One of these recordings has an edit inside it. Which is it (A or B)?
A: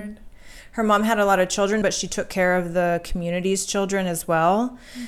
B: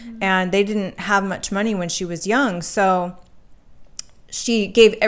A